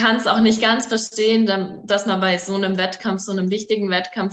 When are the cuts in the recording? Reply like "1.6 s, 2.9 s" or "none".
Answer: none